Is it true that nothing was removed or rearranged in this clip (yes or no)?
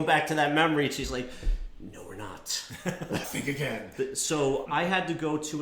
no